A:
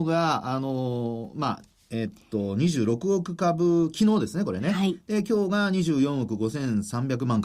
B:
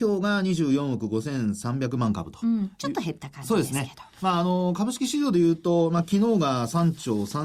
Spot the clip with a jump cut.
B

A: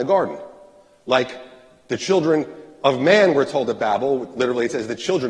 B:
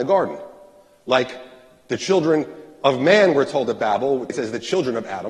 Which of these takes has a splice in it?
B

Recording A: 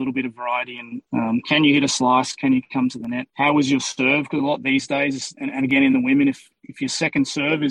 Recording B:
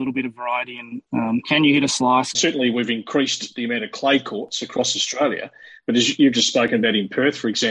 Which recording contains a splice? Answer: B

